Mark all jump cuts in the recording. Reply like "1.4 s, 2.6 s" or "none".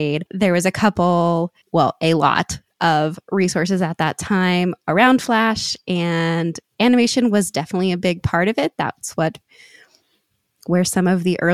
1.6 s